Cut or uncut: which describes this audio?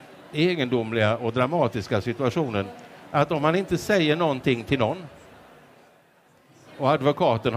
uncut